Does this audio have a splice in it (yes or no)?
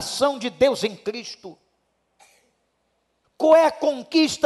yes